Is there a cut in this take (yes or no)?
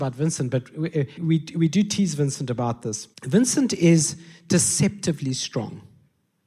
yes